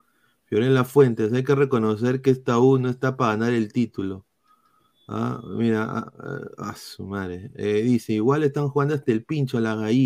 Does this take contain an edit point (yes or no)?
no